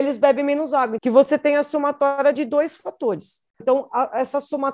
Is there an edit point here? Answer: yes; 2 cuts; at 1.0 s, 3.6 s

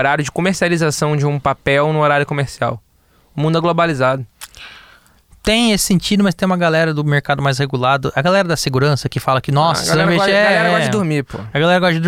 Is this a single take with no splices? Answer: yes; 0 cuts

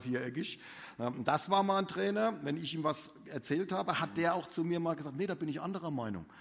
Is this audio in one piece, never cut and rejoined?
yes; 0 cuts

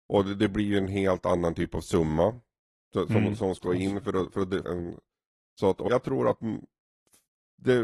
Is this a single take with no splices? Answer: no; 2 cuts; at 4.6 s, 5.9 s

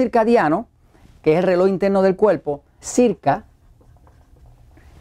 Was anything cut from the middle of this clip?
yes; 1 cut; at 2.8 s

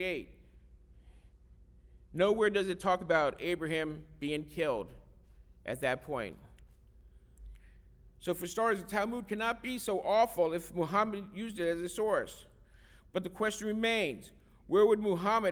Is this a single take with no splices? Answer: yes; 0 cuts

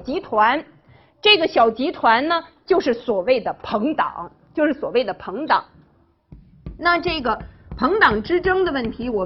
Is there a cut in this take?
no; 0 cuts

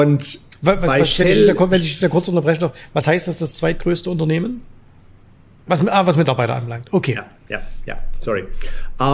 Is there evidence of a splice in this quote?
yes; 1 cut; at 5.7 s

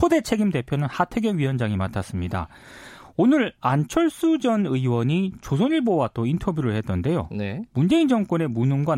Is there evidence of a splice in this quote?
no; 0 cuts

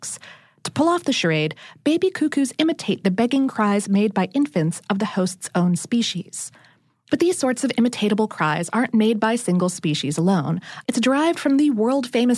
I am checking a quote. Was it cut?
yes; 1 cut; at 10.8 s

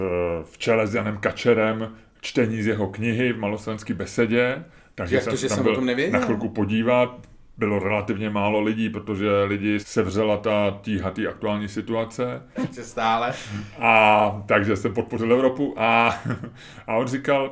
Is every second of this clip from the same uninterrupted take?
no; 2 cuts; at 9.8 s, 12.6 s

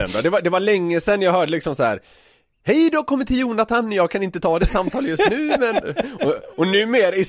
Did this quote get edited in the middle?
no; 0 cuts

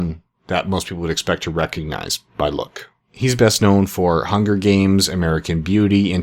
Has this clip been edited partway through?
yes; 1 cut; at 3.0 s

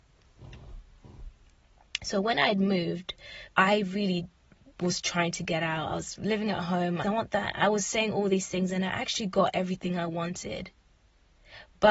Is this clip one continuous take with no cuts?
no; 2 cuts; at 3.5 s, 7.0 s

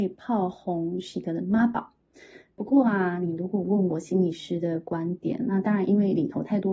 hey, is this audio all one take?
yes; 0 cuts

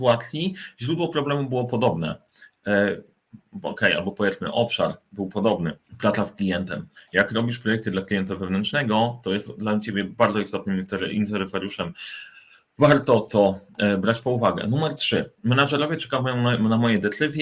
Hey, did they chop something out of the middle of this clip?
yes; 1 cut; at 5.9 s

